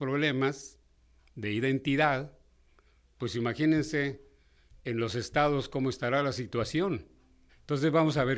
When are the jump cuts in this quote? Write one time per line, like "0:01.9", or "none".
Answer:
0:07.5